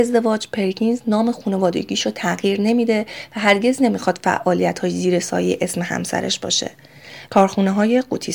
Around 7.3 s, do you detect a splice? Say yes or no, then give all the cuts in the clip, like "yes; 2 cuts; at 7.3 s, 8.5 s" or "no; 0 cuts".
yes; 1 cut; at 7.3 s